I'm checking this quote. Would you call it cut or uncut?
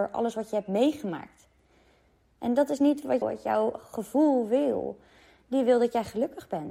cut